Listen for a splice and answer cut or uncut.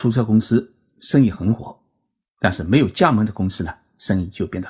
uncut